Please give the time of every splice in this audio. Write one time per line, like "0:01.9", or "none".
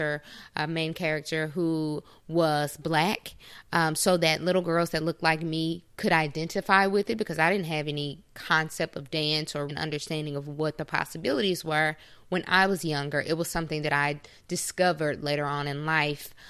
0:09.7